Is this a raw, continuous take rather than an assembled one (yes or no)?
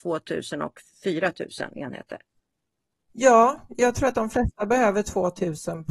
yes